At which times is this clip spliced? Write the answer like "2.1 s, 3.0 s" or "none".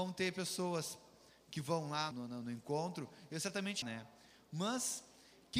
2.1 s, 3.8 s